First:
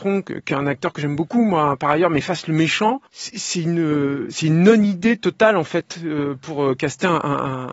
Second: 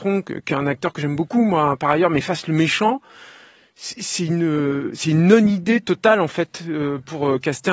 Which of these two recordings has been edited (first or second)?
first